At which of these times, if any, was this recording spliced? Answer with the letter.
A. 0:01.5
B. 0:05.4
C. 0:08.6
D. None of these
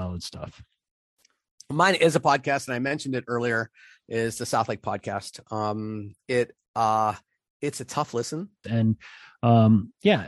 C